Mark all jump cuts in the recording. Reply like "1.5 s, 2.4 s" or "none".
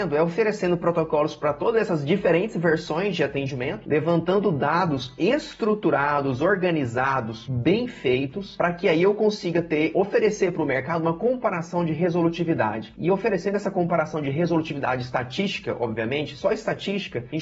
16.4 s